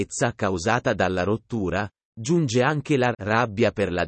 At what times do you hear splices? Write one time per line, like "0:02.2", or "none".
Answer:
0:03.1